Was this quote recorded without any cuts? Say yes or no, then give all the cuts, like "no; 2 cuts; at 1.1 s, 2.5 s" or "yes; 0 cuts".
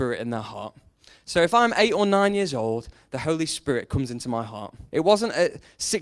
no; 1 cut; at 4.9 s